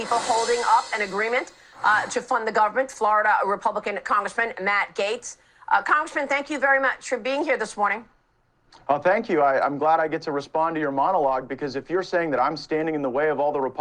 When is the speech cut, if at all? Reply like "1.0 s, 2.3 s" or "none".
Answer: none